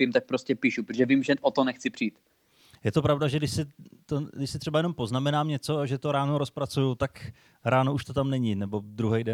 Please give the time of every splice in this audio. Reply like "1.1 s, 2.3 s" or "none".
none

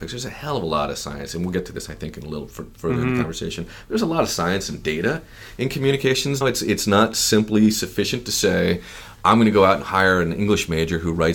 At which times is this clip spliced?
6.4 s

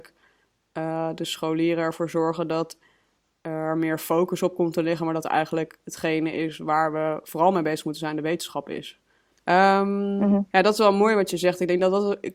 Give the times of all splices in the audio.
9.3 s, 10.5 s

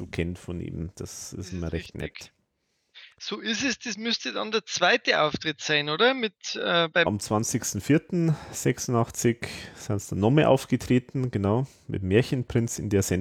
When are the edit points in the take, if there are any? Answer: 7.1 s

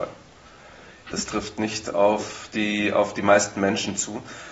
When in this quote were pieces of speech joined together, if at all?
1.1 s

